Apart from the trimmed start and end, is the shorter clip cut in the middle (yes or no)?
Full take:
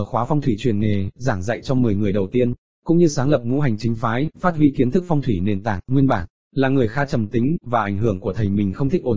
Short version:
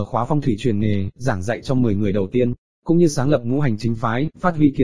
no